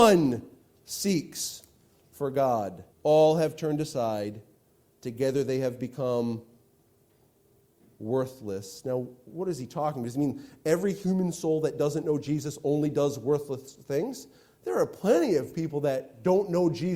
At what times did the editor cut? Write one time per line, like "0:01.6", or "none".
0:02.9